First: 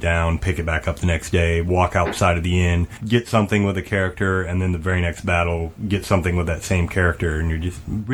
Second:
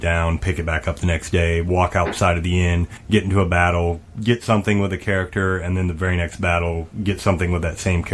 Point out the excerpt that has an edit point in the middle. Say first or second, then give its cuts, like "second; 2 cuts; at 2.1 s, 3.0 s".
first; 1 cut; at 3.0 s